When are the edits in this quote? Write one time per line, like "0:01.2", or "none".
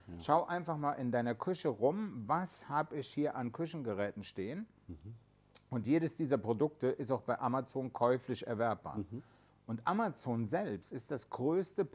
none